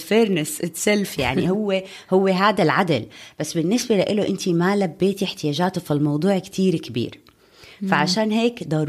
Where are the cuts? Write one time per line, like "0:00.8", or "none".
none